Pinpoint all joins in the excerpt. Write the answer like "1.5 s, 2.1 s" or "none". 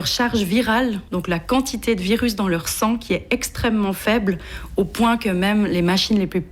none